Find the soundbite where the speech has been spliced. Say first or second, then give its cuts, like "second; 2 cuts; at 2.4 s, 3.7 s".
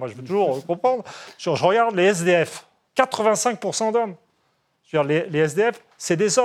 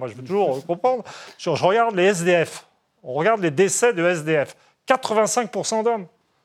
first; 1 cut; at 2.9 s